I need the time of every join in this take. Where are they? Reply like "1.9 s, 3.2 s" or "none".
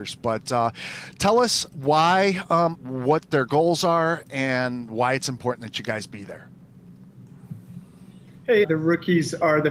2.7 s, 8.6 s